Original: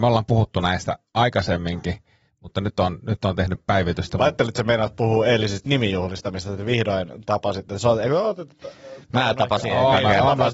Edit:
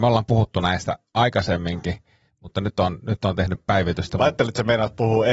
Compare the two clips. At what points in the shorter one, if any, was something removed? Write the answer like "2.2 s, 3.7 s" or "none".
none